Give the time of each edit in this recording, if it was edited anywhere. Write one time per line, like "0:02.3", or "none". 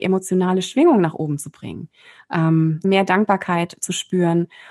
0:02.8